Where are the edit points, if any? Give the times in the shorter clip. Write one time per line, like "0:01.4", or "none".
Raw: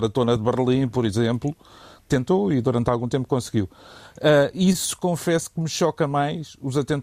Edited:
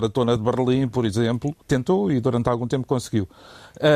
0:01.6